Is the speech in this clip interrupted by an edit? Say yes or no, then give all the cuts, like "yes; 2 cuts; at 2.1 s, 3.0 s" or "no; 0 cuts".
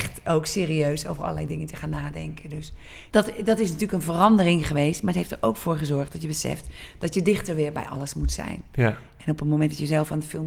no; 0 cuts